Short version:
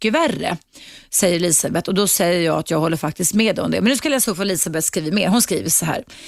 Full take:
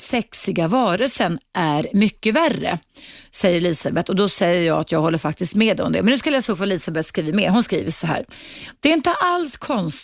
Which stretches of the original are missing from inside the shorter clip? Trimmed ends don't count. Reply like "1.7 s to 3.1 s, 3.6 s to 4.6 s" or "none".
none